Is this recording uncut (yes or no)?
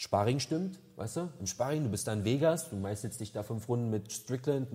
yes